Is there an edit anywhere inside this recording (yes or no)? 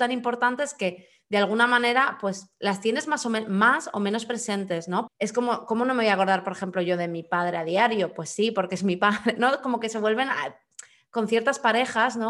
yes